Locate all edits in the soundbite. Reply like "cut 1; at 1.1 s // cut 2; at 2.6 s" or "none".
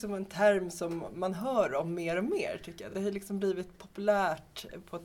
none